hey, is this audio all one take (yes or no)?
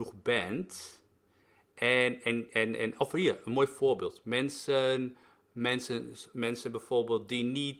yes